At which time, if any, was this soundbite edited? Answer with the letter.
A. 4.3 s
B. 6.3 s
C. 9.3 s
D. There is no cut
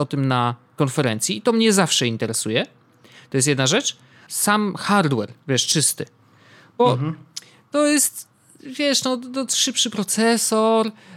A